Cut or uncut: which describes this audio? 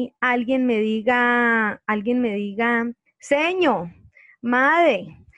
cut